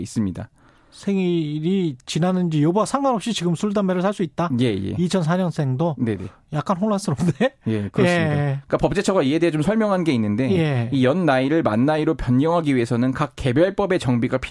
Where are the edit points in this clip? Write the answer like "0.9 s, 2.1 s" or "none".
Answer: none